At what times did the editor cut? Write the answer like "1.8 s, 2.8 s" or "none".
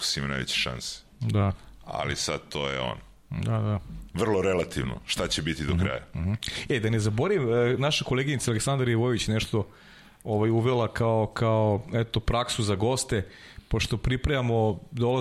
none